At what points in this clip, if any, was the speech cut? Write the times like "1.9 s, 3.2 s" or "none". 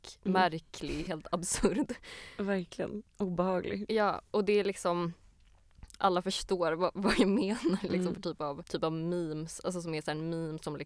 1.1 s, 6.0 s